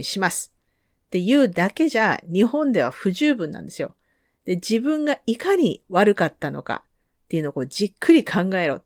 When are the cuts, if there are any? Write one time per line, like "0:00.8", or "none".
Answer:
none